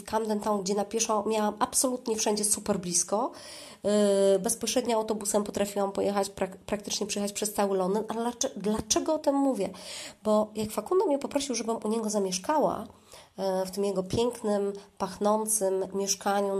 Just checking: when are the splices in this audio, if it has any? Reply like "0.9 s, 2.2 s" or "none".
none